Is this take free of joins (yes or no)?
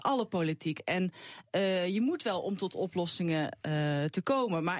yes